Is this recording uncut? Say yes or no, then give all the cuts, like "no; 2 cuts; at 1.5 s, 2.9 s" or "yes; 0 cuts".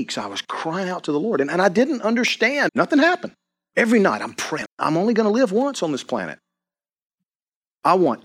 no; 2 cuts; at 2.7 s, 4.7 s